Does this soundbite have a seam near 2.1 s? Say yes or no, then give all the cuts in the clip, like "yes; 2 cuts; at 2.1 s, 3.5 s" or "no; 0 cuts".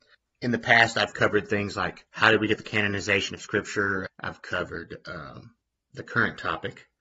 yes; 2 cuts; at 2.1 s, 4.1 s